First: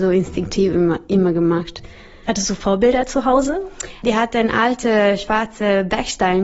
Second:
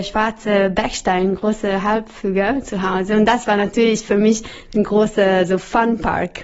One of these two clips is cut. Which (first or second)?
first